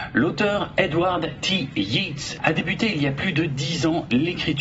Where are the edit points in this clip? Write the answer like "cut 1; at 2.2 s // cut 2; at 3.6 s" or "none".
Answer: cut 1; at 2.4 s